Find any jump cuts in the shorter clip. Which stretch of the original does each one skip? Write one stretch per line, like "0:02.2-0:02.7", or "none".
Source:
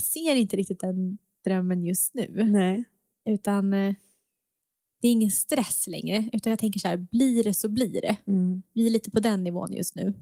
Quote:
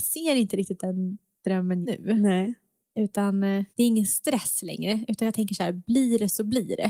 0:01.8-0:02.1
0:04.0-0:04.9